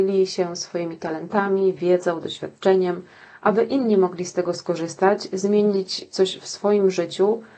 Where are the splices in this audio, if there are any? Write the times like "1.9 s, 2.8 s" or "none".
none